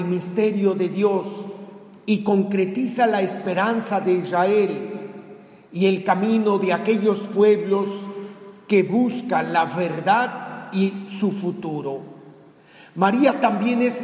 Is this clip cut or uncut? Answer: uncut